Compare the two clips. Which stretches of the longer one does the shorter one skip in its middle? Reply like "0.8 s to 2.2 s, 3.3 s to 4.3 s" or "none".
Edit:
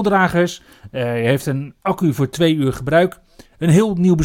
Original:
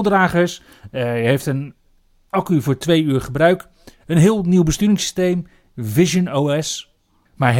1.8 s to 2.3 s